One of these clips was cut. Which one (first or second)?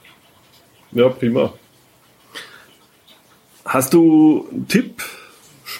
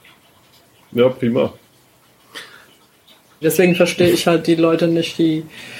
second